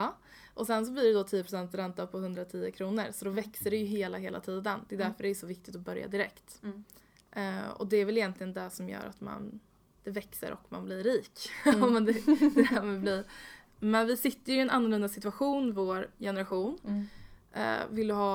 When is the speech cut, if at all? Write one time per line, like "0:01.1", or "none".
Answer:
0:10.0

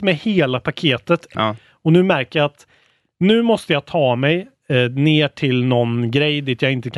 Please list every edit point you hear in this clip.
0:01.3

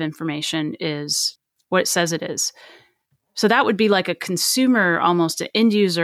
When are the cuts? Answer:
none

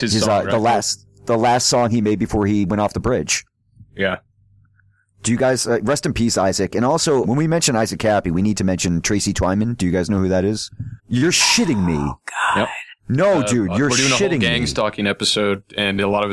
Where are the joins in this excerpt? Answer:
0:07.2
0:11.0
0:13.0

